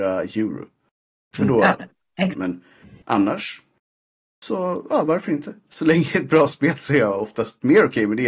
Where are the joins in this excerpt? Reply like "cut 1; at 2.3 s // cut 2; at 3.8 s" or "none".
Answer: cut 1; at 2.3 s

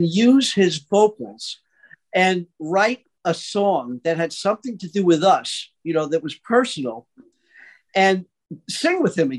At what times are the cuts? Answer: none

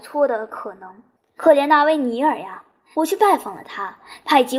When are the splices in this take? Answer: cut 1; at 1.4 s // cut 2; at 2.9 s

